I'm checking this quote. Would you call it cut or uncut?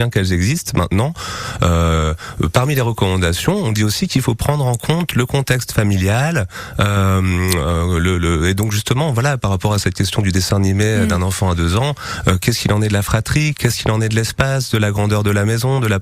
uncut